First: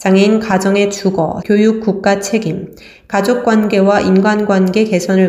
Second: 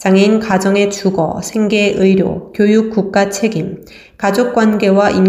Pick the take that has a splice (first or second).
first